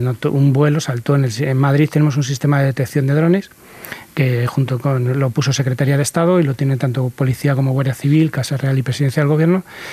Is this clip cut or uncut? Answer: uncut